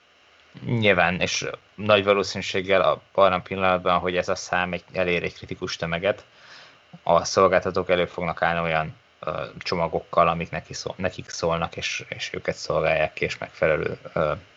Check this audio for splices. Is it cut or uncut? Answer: uncut